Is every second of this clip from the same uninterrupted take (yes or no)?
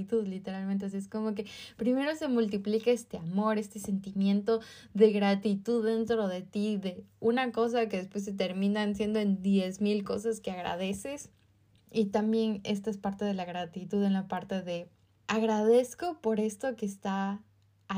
no